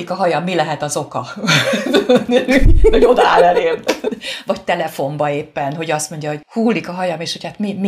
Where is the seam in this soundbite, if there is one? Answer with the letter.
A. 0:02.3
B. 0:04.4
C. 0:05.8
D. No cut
D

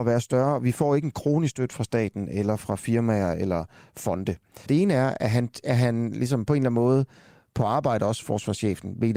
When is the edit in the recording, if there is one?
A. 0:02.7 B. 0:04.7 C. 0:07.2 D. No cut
B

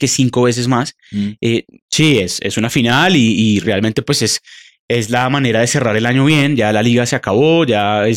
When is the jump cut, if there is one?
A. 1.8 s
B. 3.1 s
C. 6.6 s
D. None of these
A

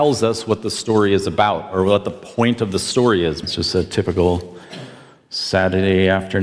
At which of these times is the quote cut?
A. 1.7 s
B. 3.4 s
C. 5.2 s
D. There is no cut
B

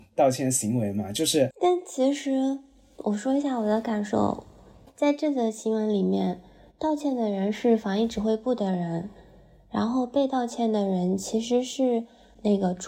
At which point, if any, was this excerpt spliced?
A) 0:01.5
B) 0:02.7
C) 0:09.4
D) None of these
A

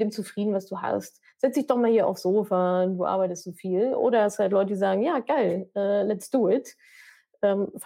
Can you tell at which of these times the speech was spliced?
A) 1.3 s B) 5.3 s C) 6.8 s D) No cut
D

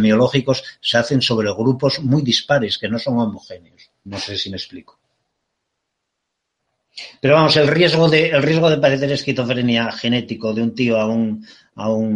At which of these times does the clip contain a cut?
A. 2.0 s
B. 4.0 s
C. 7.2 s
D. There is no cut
B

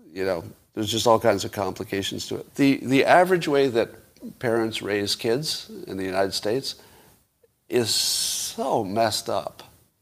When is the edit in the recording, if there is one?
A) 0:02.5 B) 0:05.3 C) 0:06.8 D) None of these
A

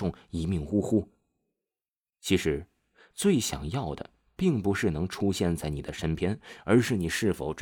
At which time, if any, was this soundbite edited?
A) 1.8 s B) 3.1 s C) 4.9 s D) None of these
B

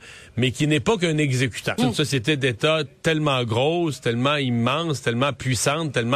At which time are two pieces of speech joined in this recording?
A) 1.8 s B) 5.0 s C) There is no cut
A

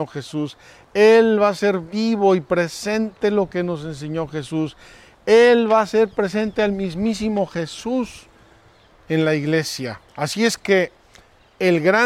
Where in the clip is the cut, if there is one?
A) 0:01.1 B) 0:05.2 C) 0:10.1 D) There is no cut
C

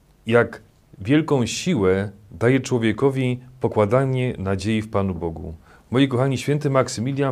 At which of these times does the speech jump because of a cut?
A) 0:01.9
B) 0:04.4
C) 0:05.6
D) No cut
D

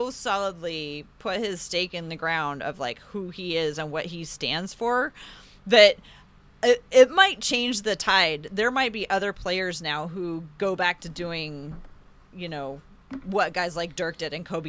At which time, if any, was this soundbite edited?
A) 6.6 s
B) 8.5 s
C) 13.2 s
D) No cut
D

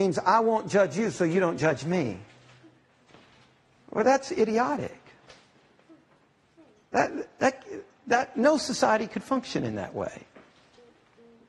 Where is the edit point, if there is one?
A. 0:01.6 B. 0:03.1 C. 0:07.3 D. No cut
D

